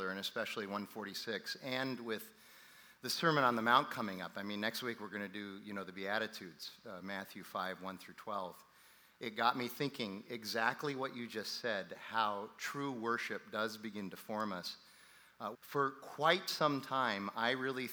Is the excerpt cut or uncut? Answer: cut